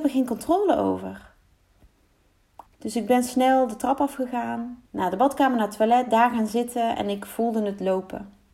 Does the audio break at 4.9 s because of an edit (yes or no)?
yes